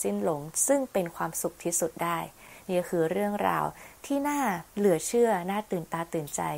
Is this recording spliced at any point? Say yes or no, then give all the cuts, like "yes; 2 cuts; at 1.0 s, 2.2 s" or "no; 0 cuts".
yes; 1 cut; at 4.7 s